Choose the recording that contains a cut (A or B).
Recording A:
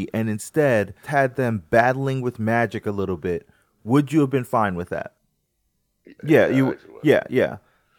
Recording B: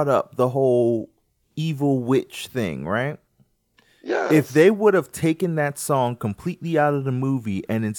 A